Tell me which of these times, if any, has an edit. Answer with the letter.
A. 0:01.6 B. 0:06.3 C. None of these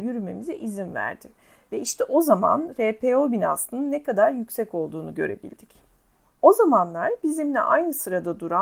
B